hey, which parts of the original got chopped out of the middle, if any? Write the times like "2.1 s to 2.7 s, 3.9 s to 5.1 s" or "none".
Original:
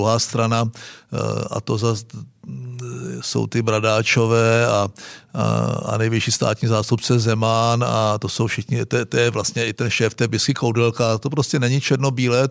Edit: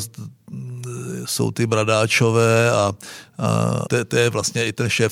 5.8 s to 8.9 s